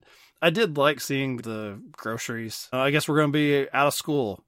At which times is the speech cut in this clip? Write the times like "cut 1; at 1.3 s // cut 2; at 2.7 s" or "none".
cut 1; at 1.4 s // cut 2; at 2.7 s

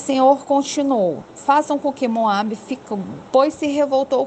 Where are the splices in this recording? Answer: cut 1; at 3.3 s

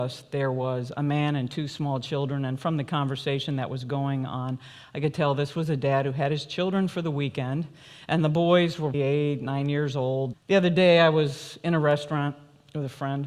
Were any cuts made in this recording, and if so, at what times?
cut 1; at 8.9 s // cut 2; at 10.3 s

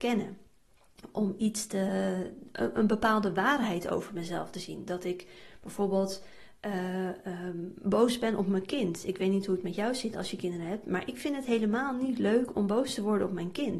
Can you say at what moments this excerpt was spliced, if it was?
none

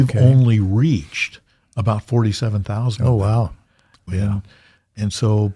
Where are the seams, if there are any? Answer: cut 1; at 4.1 s

